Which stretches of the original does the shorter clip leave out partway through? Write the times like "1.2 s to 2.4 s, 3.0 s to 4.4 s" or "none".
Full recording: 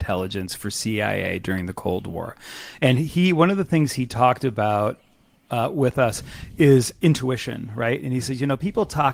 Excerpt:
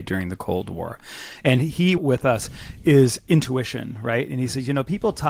3.3 s to 5.7 s

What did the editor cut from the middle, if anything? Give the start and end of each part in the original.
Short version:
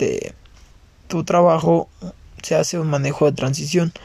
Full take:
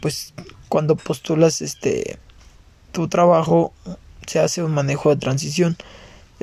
none

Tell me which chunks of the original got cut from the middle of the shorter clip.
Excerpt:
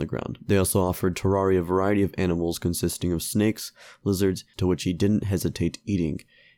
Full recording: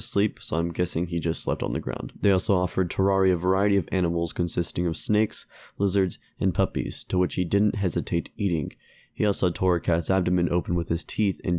6.3 s to 7.1 s

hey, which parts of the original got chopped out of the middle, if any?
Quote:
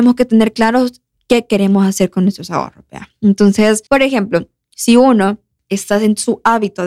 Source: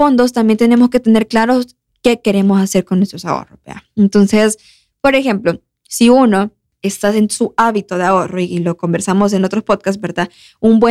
4.6 s to 5.0 s

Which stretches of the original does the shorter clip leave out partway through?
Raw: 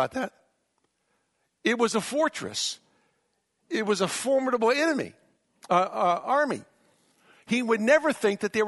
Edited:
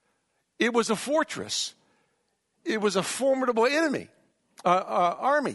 none

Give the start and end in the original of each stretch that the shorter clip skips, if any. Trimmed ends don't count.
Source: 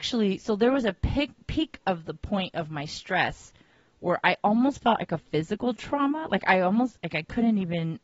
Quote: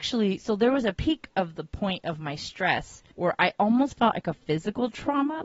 0.9 s to 1.4 s, 3.6 s to 4.0 s

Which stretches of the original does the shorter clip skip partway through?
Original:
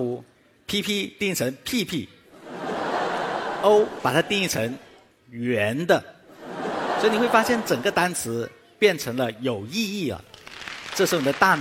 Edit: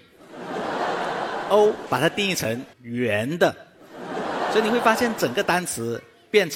4.9 s to 5.2 s

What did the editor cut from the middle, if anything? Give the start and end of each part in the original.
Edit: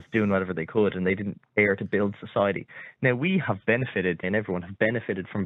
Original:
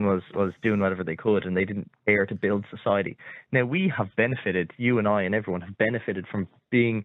4.7 s to 5.2 s

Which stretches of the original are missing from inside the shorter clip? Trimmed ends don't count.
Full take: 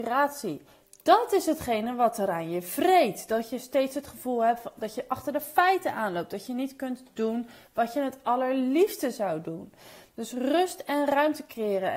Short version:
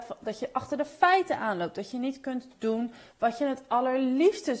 none

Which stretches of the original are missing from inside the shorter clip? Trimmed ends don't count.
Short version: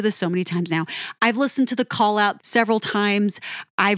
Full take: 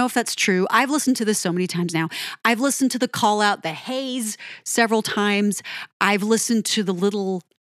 3.6 s to 4.6 s

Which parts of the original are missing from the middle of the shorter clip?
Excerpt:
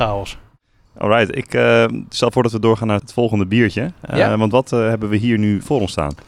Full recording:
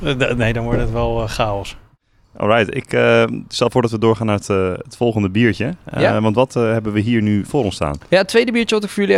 4.4 s to 4.8 s

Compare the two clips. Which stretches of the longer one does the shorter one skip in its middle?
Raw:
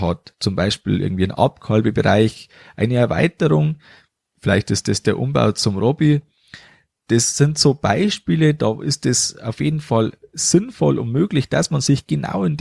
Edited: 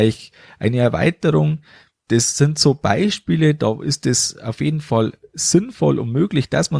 4.2 s to 7.0 s

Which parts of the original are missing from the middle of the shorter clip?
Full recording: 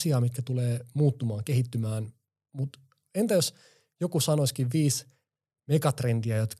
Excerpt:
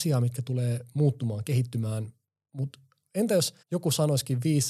3.6 s to 3.9 s

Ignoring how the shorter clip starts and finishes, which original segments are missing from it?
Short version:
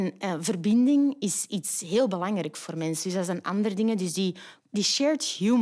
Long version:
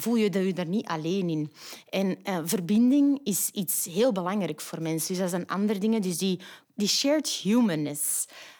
none

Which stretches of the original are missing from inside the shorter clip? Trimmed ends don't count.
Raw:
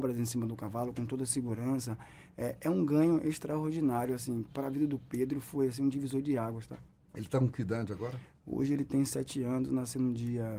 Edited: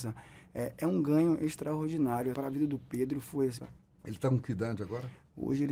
4.2 s to 4.5 s, 5.8 s to 6.7 s

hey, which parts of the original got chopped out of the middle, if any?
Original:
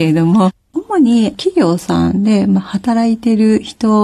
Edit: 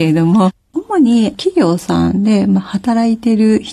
none

